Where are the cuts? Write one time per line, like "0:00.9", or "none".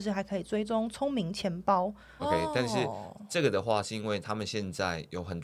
0:02.2